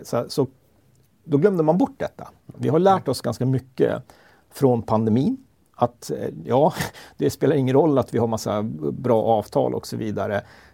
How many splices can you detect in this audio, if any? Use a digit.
1